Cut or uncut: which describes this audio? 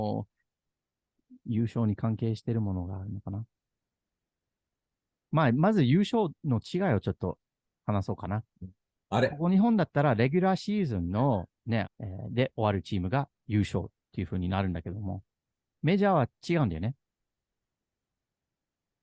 cut